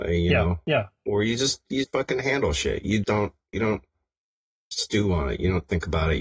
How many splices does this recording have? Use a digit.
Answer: 2